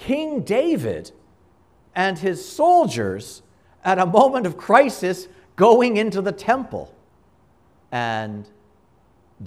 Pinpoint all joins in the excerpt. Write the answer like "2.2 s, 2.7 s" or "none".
7.8 s